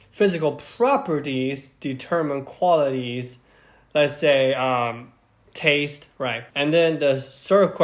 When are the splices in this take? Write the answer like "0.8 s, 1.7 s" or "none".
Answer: 6.5 s